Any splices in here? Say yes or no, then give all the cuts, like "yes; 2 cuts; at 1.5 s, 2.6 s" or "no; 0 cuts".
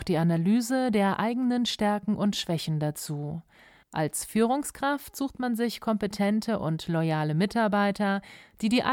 yes; 1 cut; at 3.8 s